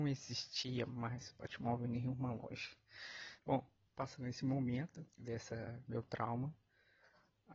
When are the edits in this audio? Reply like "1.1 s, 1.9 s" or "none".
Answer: 3.4 s, 5.1 s